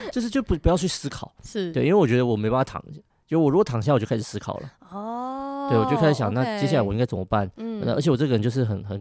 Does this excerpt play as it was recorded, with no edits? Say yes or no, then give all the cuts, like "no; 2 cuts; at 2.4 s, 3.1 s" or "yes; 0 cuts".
yes; 0 cuts